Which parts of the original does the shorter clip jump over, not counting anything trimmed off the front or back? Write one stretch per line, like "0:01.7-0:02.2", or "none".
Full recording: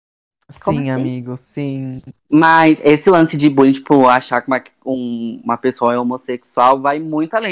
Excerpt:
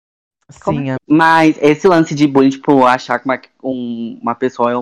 0:01.0-0:02.2